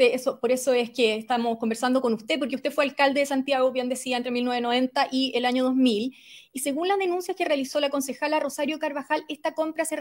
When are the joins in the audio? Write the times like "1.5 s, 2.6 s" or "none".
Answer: none